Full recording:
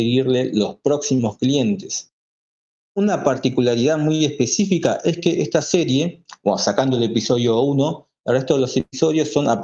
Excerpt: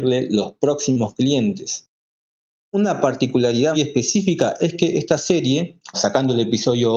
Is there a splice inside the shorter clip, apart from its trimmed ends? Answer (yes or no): yes